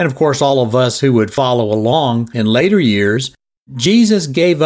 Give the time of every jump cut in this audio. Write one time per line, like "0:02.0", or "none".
none